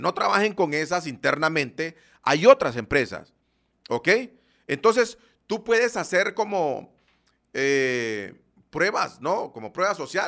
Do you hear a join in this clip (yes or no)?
no